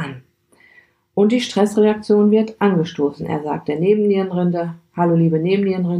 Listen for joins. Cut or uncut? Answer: uncut